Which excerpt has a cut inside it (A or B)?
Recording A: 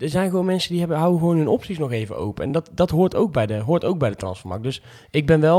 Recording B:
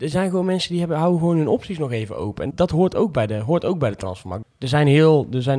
B